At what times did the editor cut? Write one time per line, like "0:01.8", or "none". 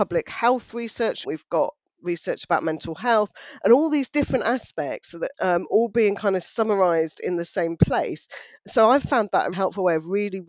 0:01.2
0:05.3
0:09.5